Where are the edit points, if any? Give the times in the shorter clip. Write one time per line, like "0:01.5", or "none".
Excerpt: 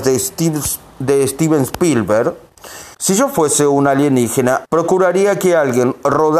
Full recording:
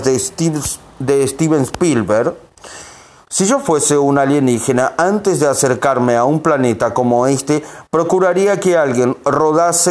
0:02.9
0:04.7